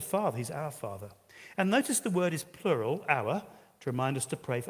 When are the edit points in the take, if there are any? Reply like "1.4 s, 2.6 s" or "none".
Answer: none